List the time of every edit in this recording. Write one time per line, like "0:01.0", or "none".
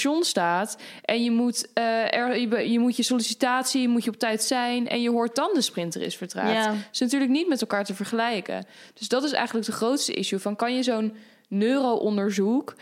none